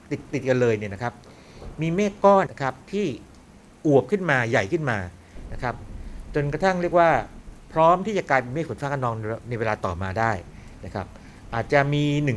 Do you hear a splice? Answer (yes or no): yes